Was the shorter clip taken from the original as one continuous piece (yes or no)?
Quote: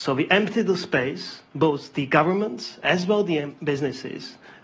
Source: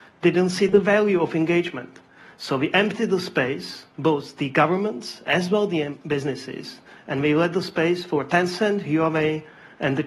yes